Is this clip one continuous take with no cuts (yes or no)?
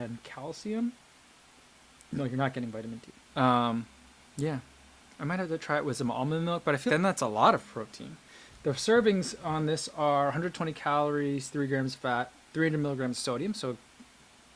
no